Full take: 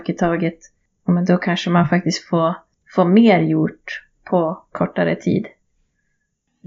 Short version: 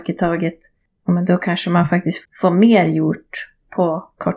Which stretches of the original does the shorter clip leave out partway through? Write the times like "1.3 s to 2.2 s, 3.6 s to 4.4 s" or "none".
2.2 s to 2.8 s